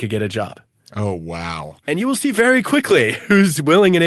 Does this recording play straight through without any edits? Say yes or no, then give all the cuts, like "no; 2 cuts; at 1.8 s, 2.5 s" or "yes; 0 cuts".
yes; 0 cuts